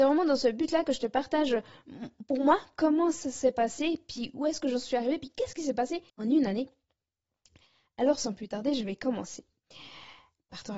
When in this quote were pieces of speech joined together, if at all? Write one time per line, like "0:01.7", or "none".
0:06.1